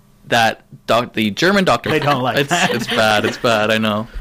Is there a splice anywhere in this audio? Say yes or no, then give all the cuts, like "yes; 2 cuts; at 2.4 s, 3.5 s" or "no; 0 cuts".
yes; 1 cut; at 1.9 s